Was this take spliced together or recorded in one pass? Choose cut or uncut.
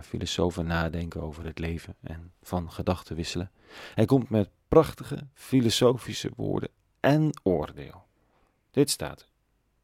uncut